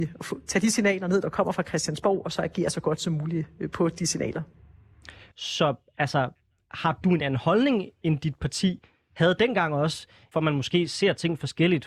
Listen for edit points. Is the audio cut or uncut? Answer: cut